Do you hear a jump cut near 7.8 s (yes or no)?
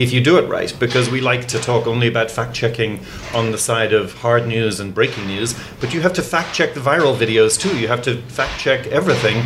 no